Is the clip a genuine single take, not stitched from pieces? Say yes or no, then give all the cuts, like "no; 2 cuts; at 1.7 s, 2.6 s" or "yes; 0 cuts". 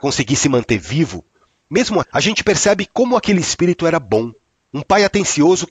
no; 1 cut; at 2.0 s